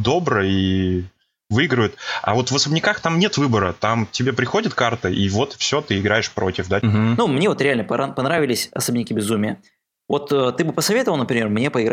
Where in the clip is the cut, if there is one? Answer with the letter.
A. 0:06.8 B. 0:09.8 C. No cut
A